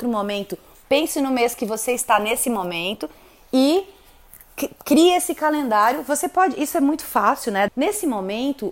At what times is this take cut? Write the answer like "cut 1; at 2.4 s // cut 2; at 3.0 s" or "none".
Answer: cut 1; at 7.7 s